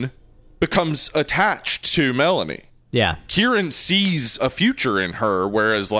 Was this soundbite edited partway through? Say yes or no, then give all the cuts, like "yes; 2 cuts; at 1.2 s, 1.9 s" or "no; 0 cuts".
yes; 2 cuts; at 2.8 s, 4.4 s